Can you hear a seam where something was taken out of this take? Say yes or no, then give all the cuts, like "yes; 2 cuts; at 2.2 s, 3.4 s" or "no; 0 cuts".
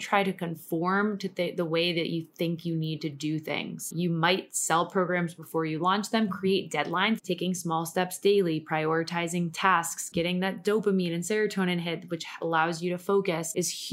yes; 2 cuts; at 7.2 s, 10.1 s